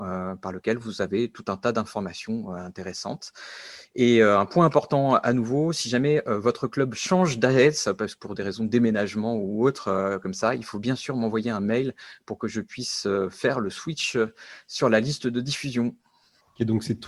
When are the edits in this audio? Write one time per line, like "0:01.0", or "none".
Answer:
none